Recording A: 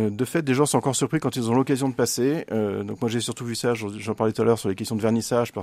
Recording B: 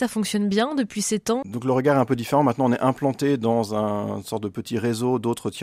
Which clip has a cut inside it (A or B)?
B